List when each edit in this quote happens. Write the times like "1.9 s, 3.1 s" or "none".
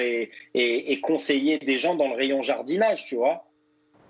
none